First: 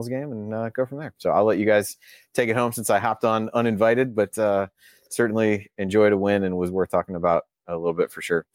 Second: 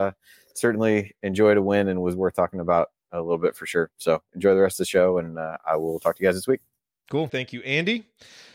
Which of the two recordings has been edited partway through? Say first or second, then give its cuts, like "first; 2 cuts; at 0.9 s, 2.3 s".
second; 1 cut; at 7.3 s